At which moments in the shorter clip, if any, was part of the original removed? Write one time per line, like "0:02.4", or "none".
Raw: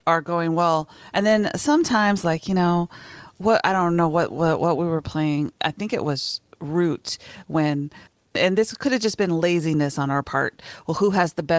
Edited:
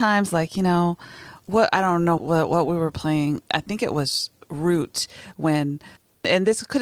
0:02.2